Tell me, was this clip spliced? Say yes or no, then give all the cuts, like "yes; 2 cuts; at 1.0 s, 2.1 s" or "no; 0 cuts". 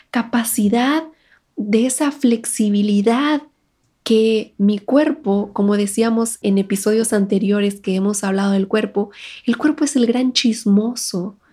no; 0 cuts